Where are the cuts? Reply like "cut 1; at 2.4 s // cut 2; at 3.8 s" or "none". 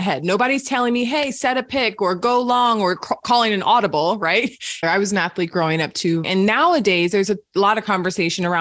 cut 1; at 4.8 s // cut 2; at 6.2 s